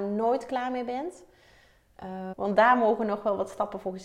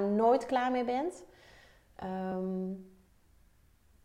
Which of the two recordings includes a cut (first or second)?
first